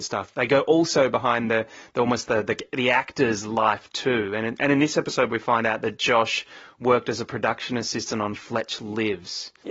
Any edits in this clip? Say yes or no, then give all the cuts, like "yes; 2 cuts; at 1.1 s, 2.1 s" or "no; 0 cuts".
no; 0 cuts